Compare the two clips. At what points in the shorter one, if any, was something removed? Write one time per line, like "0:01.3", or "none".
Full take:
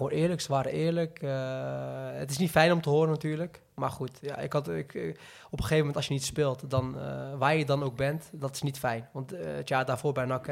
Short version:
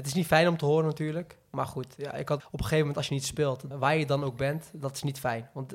0:02.4
0:03.7